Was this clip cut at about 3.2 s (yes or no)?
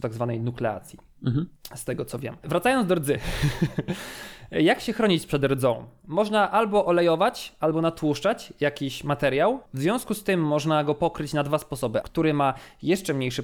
no